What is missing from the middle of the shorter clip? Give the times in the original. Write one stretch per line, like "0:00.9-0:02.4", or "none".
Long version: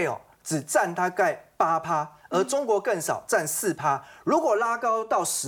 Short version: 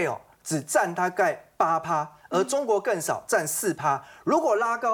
none